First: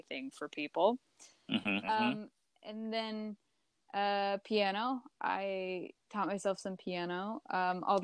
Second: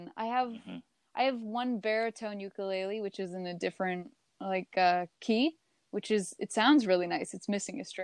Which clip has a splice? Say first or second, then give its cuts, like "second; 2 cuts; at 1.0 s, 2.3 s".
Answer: first; 1 cut; at 1.8 s